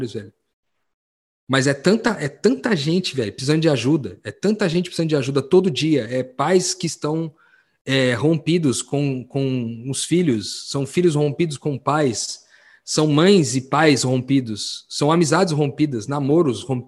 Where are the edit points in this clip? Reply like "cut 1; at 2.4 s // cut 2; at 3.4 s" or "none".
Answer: none